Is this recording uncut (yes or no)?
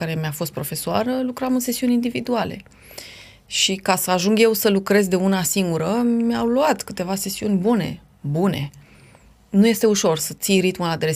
yes